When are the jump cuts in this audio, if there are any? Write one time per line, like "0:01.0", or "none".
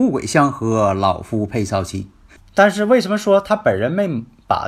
0:02.4